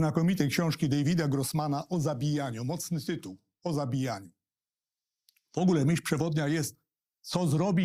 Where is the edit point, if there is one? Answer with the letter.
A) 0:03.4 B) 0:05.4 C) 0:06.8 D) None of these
D